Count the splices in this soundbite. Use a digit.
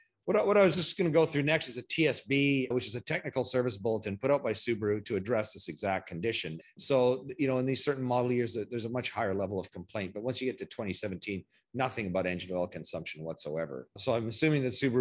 1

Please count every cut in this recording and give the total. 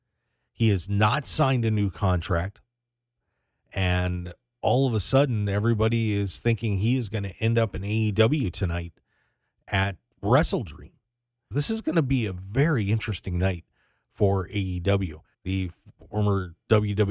2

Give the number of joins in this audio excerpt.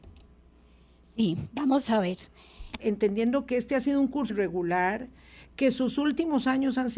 2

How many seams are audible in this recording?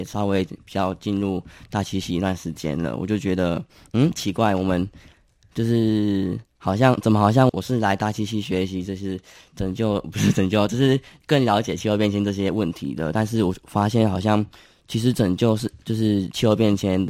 1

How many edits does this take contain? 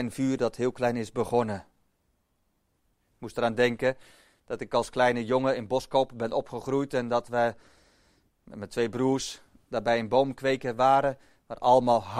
0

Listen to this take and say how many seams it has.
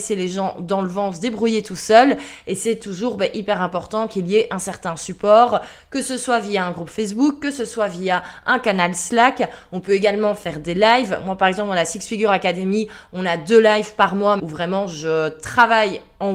1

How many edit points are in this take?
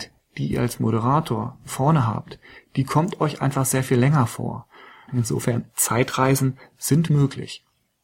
2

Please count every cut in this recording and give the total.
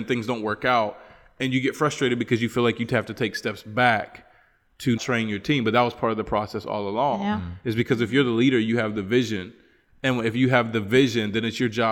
1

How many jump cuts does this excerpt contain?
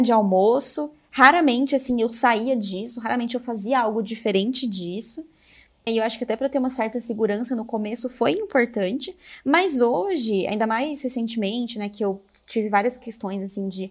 1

